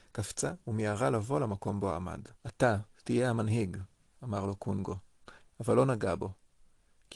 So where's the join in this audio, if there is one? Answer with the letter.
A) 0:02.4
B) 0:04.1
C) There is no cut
A